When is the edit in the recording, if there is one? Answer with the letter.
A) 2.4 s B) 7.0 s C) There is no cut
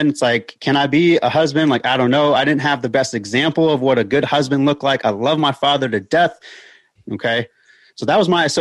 B